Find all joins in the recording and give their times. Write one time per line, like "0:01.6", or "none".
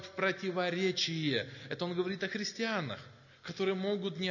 none